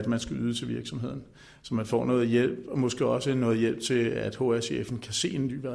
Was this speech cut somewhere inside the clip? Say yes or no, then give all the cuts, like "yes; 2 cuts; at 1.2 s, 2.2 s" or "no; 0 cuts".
no; 0 cuts